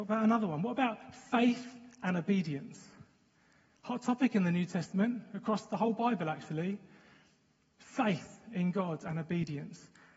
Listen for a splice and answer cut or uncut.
uncut